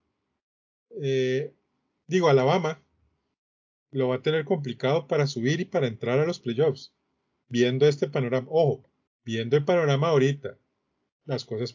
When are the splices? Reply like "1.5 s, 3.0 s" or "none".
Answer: 9.1 s